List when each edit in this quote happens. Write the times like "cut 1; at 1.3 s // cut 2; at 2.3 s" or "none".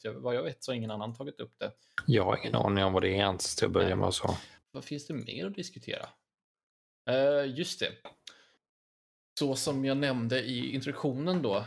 cut 1; at 4.6 s